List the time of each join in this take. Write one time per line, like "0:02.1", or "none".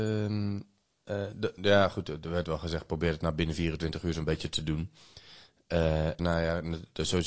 0:01.6
0:06.2

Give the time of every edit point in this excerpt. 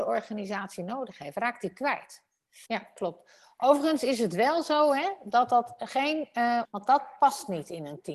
0:02.7
0:06.6

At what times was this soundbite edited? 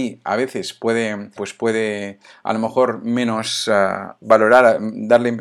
0:01.4

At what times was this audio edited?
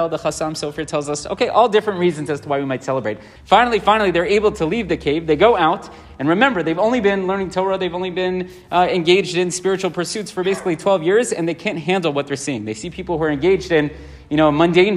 0:03.4

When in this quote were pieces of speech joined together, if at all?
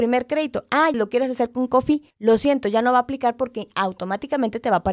0:00.9
0:02.1

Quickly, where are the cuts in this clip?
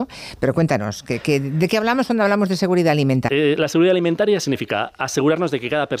0:03.3

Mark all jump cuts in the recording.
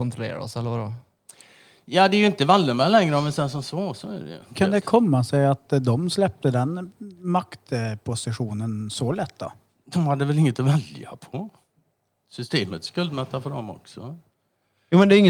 0:04.5

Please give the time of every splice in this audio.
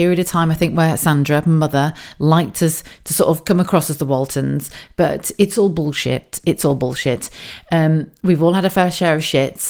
none

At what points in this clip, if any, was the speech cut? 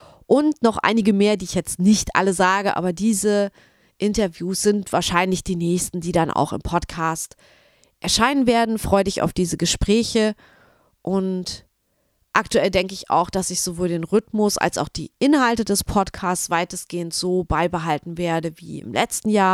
none

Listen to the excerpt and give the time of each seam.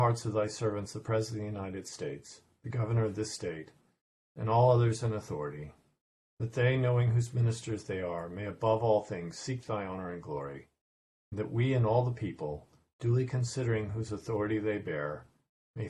none

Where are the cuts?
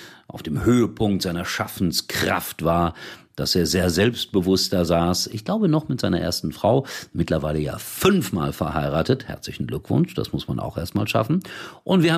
none

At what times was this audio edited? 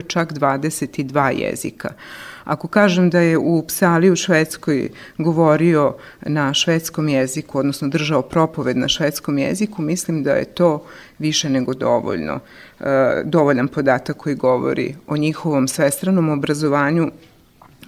none

